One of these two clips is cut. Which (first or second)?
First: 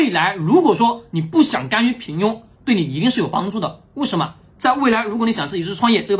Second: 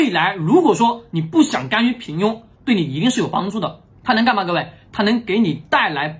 second